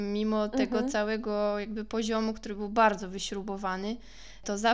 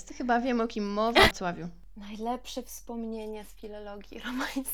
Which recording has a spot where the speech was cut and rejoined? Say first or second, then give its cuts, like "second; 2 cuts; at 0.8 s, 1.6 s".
second; 1 cut; at 1.3 s